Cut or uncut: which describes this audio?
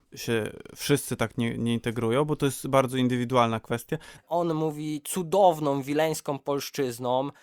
cut